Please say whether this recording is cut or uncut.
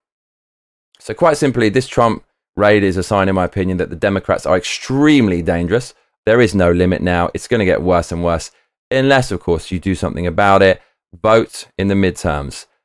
cut